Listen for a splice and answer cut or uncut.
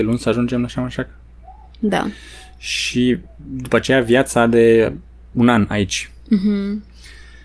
uncut